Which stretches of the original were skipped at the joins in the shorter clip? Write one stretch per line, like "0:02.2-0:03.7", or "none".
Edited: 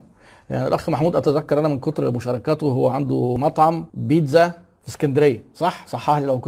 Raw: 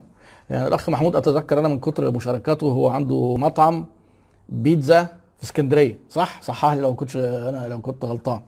0:03.9-0:04.4